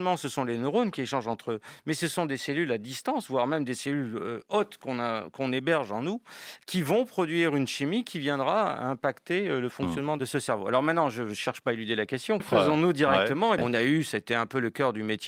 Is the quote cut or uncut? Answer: cut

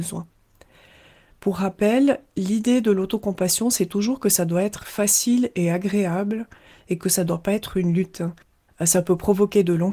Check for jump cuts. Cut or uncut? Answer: cut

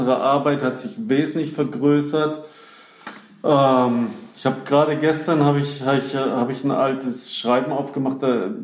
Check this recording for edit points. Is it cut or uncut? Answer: uncut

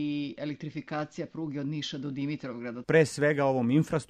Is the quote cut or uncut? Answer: cut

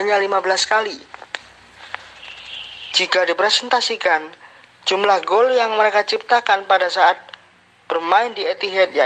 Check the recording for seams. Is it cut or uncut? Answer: cut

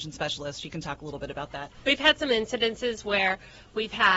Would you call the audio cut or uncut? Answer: uncut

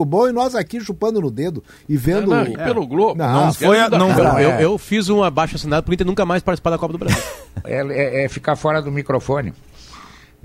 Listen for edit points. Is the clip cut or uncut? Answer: cut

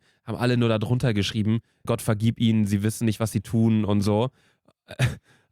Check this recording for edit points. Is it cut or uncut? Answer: cut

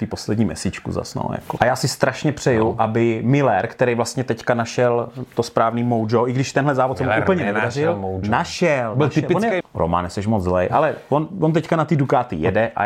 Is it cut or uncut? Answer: cut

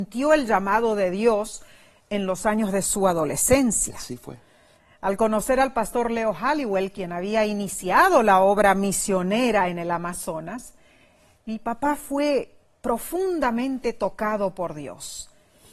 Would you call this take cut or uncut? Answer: uncut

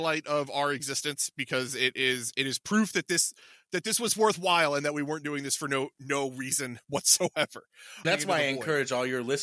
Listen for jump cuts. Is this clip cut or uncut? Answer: cut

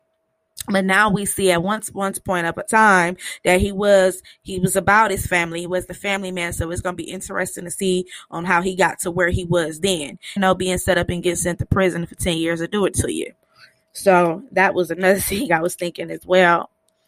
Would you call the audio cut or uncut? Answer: cut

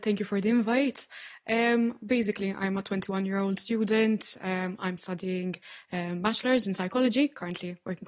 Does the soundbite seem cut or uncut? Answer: uncut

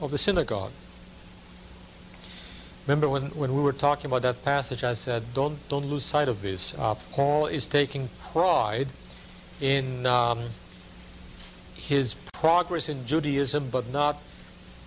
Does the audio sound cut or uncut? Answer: cut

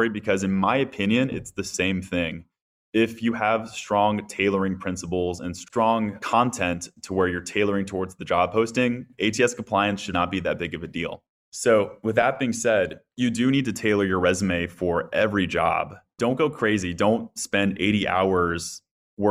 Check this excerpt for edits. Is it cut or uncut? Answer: cut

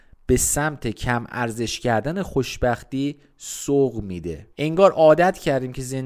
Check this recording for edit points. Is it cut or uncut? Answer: cut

